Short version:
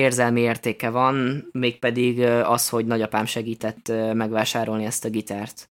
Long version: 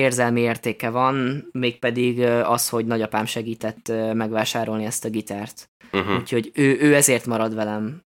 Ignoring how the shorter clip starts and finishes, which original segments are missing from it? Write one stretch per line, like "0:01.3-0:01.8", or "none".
none